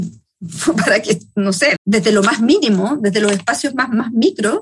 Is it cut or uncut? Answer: cut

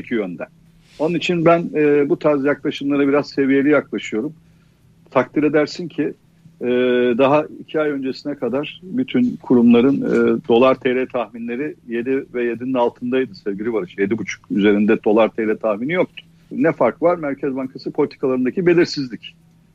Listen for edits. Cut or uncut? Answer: cut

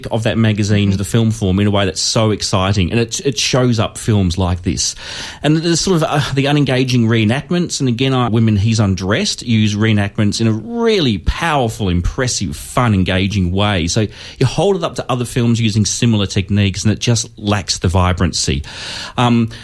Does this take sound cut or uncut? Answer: cut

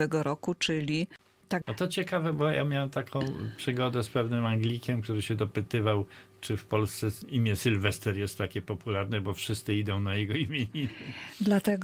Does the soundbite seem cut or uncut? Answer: cut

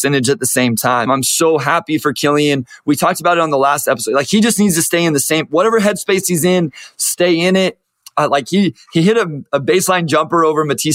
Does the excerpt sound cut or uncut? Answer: cut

